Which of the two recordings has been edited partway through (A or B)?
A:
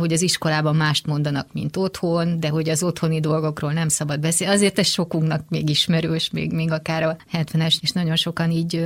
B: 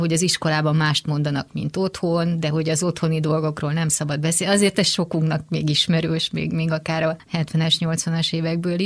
A